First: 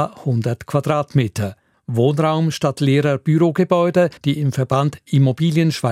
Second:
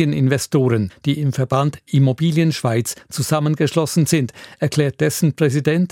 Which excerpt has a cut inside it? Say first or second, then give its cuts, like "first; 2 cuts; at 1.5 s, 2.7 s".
first; 2 cuts; at 1.7 s, 4.2 s